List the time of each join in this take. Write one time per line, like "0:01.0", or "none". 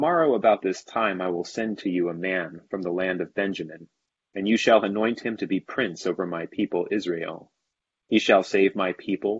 none

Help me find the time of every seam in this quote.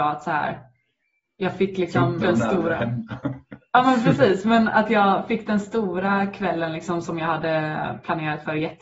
0:02.2

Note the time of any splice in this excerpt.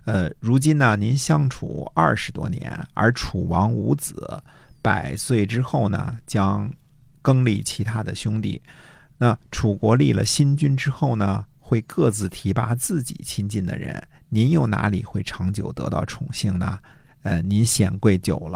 none

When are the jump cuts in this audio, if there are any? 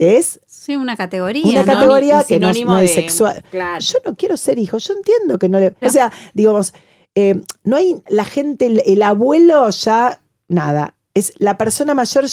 0:03.8
0:05.8
0:08.1

